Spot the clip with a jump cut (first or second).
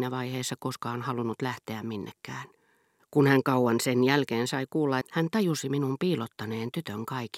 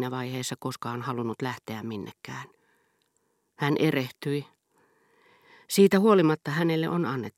first